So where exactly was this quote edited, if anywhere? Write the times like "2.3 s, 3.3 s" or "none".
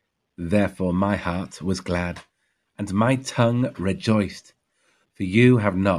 5.0 s